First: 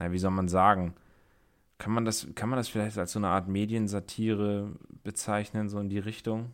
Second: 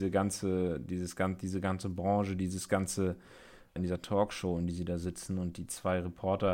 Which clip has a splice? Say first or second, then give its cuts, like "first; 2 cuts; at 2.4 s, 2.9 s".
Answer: second; 1 cut; at 3.8 s